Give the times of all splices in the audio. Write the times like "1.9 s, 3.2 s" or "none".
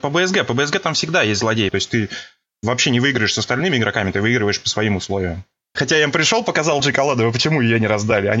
1.7 s, 5.7 s, 6.8 s